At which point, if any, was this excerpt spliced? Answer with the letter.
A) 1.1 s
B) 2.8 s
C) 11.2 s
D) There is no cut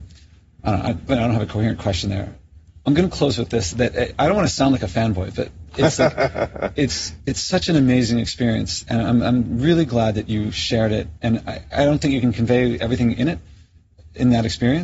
A